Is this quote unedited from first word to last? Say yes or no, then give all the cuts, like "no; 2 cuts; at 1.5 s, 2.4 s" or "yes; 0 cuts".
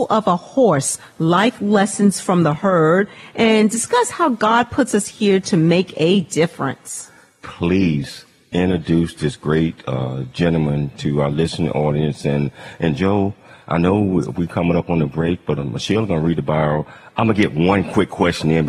no; 1 cut; at 15.6 s